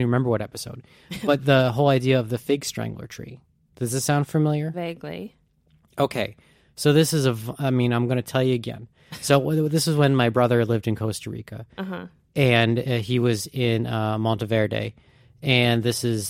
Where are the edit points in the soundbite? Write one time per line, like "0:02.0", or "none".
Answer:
none